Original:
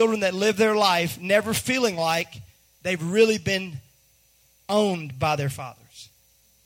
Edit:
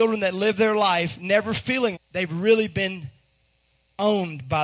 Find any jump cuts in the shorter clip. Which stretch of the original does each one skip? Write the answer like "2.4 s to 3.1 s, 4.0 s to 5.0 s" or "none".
2.0 s to 2.7 s